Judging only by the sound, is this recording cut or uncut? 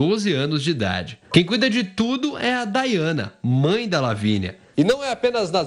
cut